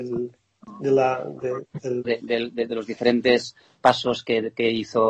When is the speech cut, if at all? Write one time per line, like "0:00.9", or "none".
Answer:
0:02.0